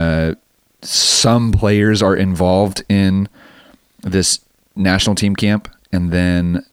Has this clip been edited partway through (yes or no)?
no